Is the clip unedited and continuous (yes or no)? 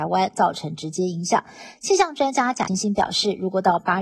no